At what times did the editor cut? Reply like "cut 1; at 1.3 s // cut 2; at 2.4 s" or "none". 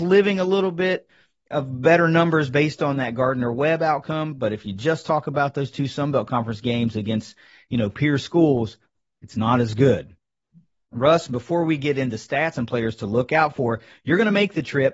none

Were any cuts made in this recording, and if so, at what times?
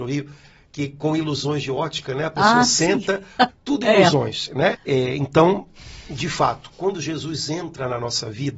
cut 1; at 3.5 s // cut 2; at 4.7 s

